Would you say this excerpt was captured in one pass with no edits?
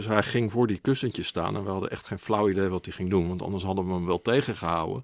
yes; 0 cuts

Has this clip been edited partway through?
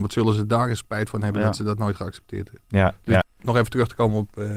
yes; 1 cut; at 3.2 s

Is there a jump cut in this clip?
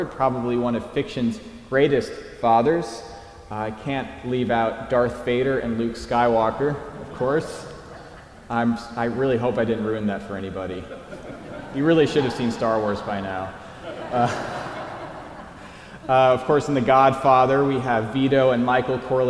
no; 0 cuts

